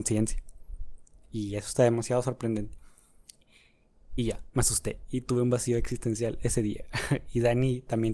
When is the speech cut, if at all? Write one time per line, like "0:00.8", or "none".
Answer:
none